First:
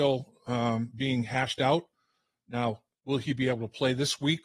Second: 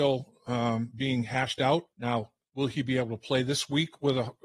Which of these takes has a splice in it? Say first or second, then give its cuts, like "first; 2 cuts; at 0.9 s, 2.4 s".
second; 1 cut; at 1.9 s